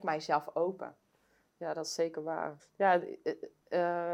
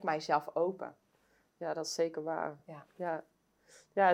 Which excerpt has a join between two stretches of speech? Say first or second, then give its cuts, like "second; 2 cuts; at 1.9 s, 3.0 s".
first; 1 cut; at 2.6 s